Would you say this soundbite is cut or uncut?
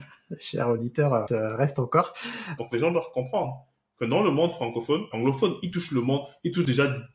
cut